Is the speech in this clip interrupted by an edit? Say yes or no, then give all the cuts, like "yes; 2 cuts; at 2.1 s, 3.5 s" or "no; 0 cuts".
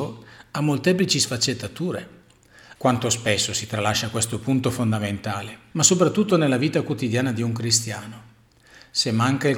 yes; 2 cuts; at 2.8 s, 5.7 s